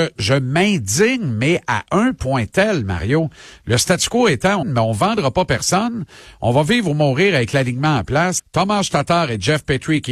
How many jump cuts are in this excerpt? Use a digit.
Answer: 2